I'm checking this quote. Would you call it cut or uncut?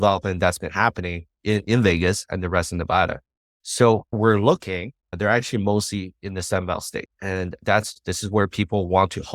cut